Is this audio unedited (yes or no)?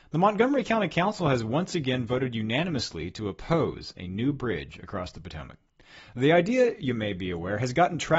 yes